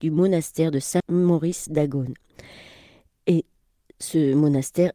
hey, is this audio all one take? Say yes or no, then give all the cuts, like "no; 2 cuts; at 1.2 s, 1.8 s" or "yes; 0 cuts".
no; 1 cut; at 1.0 s